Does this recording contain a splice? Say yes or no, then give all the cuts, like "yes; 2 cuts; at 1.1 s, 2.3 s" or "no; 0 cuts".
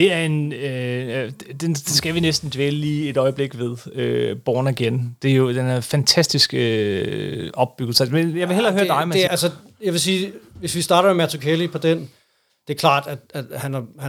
yes; 1 cut; at 9.3 s